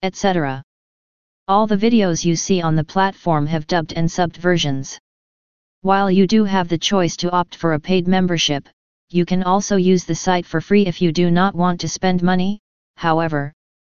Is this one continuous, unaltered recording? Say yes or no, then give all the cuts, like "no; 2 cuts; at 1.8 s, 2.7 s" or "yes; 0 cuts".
no; 1 cut; at 1.4 s